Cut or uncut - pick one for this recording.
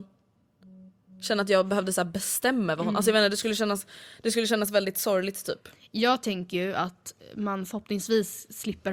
uncut